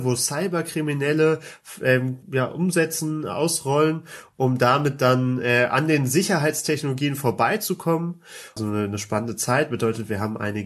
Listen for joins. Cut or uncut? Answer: cut